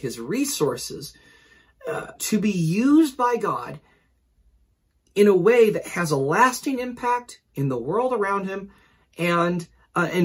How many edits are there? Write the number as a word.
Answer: one